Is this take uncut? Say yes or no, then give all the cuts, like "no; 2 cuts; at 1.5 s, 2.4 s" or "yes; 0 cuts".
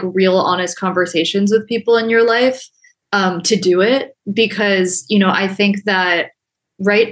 yes; 0 cuts